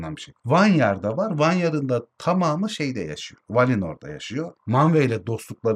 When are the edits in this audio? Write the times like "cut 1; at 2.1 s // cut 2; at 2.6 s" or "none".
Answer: cut 1; at 3.4 s

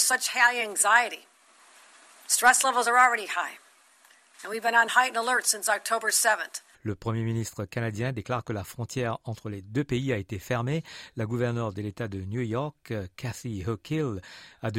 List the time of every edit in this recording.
cut 1; at 6.7 s

